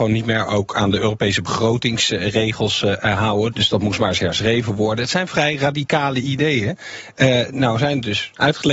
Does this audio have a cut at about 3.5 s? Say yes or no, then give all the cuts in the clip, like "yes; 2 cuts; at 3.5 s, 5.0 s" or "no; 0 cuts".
yes; 1 cut; at 3.5 s